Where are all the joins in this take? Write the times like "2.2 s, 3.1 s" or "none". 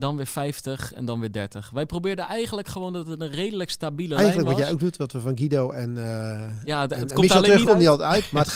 7.6 s